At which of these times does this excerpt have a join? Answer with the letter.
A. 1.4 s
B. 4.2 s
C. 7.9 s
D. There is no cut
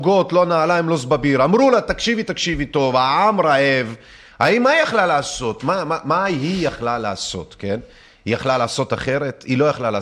D